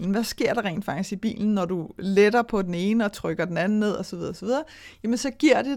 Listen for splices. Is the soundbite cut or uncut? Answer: uncut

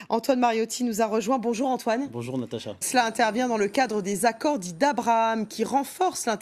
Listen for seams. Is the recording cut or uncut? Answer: cut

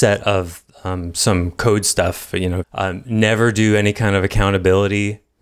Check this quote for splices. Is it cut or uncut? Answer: cut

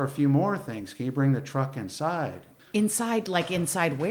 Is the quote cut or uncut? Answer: cut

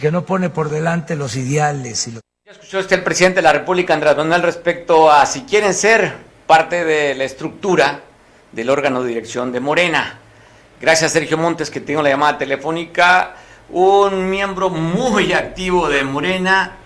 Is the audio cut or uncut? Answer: uncut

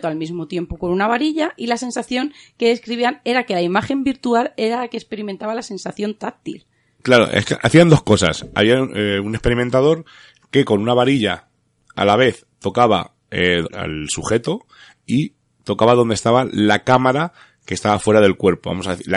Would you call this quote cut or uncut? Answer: cut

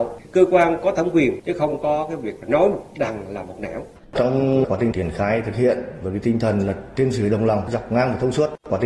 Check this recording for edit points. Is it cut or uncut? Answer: cut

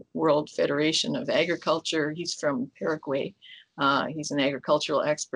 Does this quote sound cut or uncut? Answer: uncut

